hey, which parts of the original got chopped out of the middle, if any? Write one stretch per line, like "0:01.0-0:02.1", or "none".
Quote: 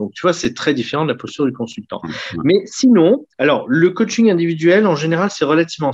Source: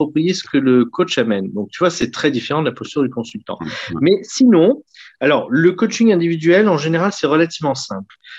0:04.9-0:05.1